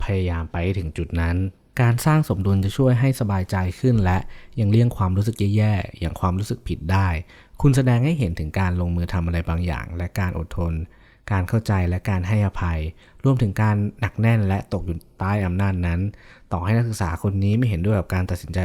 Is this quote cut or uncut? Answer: uncut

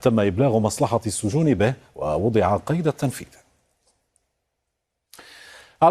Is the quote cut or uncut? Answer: uncut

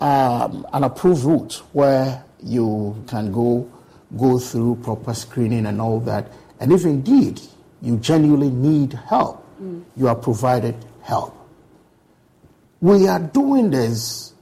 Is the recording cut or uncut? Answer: cut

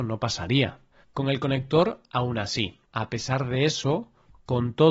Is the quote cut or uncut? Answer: cut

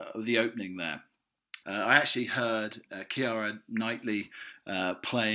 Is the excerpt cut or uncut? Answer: cut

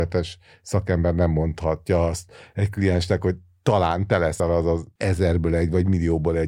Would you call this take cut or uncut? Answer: uncut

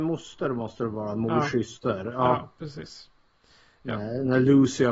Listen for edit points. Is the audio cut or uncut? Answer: uncut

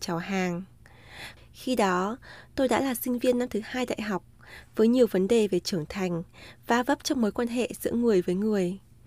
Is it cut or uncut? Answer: cut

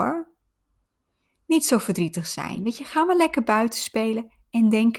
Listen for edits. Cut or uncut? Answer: uncut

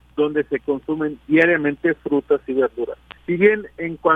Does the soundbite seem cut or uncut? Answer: cut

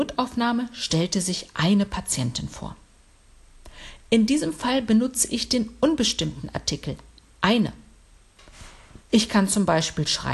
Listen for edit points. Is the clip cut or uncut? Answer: cut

